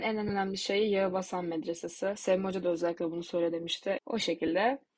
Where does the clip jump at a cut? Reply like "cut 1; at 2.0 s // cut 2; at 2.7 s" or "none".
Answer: cut 1; at 4.0 s